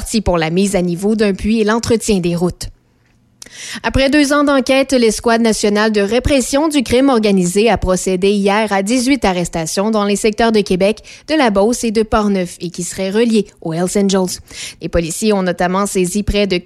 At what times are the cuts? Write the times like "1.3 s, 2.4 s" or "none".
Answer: 14.8 s